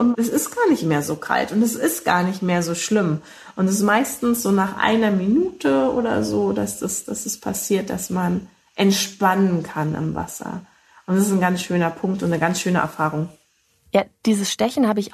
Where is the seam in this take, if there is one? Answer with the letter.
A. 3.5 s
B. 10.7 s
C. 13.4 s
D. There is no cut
D